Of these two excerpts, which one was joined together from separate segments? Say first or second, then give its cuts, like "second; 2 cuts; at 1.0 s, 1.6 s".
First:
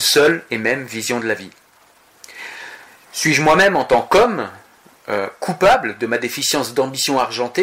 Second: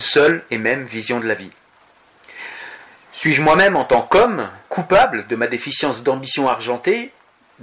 second; 1 cut; at 4.7 s